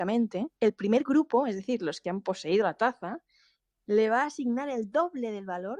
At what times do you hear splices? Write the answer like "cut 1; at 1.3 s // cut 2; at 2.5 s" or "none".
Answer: none